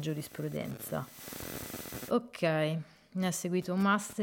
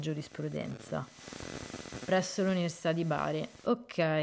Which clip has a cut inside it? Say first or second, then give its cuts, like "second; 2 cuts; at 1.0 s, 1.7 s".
first; 1 cut; at 2.1 s